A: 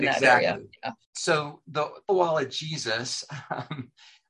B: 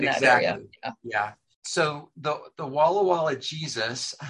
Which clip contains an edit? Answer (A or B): A